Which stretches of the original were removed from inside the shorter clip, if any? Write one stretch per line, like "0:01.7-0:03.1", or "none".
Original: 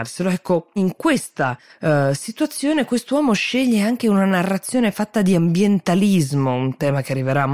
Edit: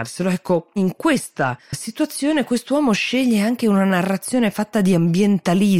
0:01.7-0:02.1